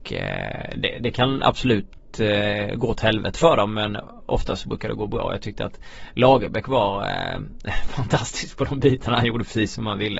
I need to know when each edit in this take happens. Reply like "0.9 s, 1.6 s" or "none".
none